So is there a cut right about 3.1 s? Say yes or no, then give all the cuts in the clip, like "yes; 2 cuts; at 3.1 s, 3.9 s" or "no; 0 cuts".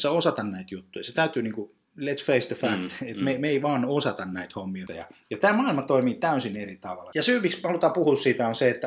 no; 2 cuts; at 4.9 s, 7.1 s